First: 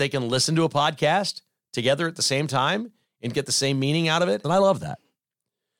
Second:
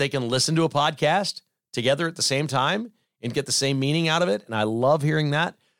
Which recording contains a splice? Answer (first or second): first